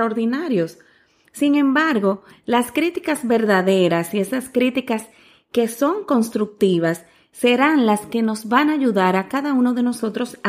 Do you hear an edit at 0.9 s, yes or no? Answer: no